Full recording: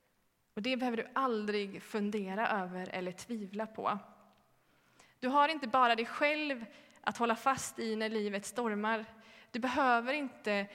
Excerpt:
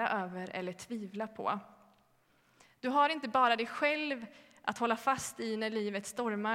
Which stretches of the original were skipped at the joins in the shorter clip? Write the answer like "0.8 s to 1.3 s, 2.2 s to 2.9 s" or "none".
none

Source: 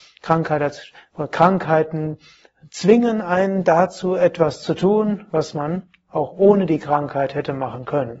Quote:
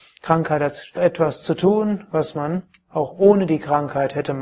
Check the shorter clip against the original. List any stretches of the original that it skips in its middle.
1.0 s to 4.2 s

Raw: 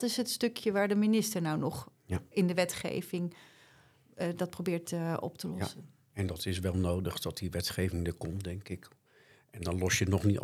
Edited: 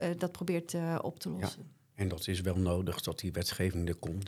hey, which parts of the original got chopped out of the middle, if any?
none

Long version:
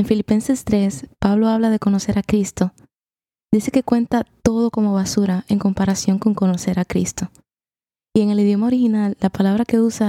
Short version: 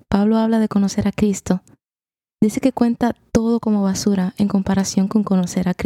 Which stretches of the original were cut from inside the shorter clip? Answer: none

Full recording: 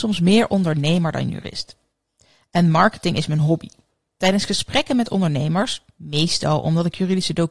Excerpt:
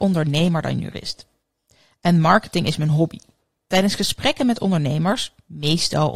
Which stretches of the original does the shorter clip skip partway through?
none

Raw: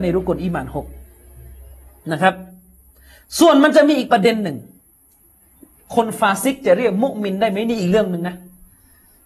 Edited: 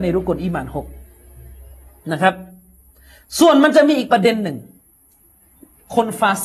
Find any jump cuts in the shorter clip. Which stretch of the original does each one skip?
none

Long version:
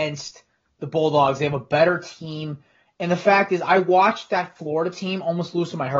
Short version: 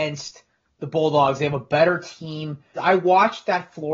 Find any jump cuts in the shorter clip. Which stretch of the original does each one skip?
2.8 s to 3.6 s

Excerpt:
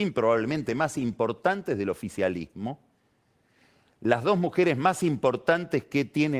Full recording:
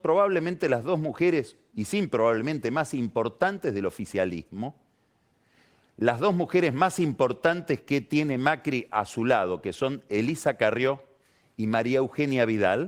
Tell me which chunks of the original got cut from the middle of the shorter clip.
none

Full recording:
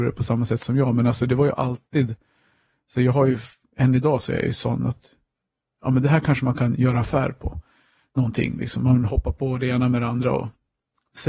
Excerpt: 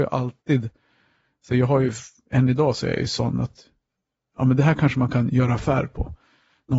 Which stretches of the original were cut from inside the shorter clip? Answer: none

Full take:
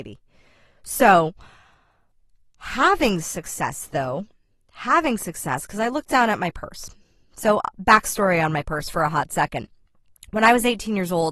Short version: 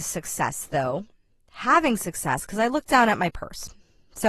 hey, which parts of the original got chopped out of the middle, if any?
none

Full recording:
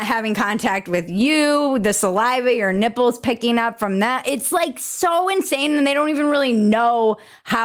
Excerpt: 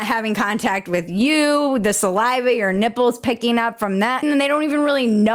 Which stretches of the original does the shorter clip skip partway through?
4.2 s to 5.7 s

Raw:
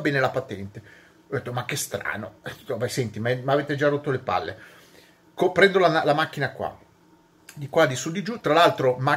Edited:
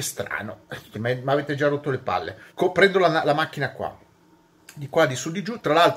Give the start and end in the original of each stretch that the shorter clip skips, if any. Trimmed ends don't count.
2.7 s to 3.1 s, 4.7 s to 5.3 s

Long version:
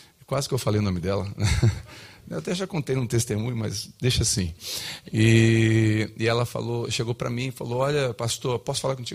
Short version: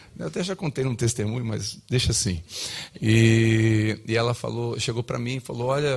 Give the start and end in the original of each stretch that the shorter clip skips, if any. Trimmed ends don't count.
none

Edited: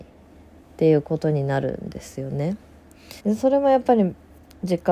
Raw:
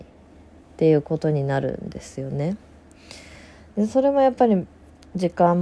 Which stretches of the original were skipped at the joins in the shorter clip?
3.2 s to 3.7 s

